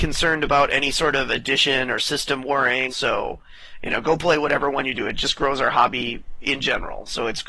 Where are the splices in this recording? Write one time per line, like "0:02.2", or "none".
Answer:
0:02.9